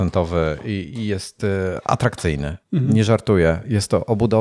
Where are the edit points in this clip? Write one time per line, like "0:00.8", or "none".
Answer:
0:02.6